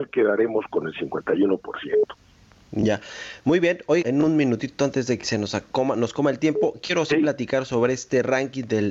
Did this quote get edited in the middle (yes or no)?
yes